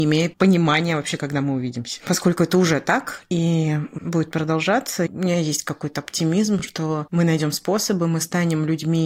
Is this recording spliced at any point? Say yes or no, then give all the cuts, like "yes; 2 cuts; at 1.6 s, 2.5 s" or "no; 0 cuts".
no; 0 cuts